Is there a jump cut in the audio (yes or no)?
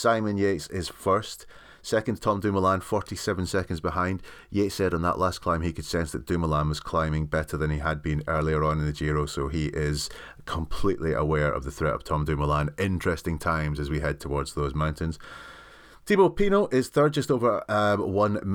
no